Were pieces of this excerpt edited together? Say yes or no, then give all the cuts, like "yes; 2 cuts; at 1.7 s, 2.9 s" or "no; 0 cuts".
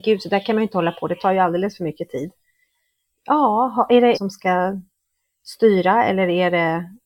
yes; 1 cut; at 4.1 s